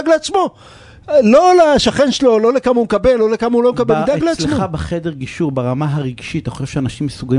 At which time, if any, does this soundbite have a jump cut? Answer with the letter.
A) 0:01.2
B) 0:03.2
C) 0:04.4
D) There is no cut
D